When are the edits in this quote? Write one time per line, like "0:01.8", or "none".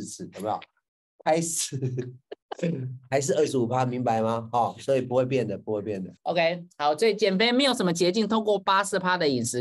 0:06.2